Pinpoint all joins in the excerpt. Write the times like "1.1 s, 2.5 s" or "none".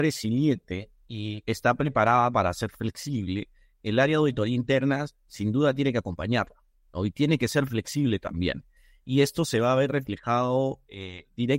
none